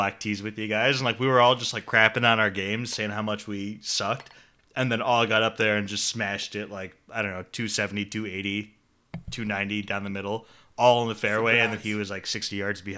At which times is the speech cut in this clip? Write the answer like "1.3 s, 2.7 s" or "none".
none

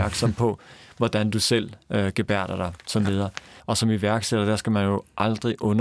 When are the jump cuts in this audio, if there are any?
3.6 s

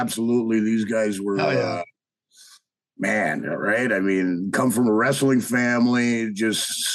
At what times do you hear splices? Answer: none

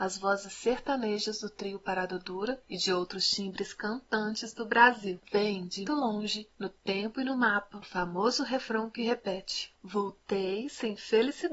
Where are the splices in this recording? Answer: 5.8 s

